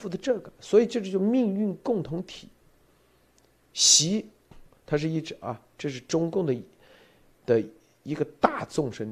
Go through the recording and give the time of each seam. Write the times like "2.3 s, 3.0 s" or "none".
none